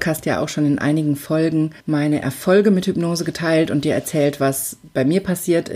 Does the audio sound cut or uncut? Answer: cut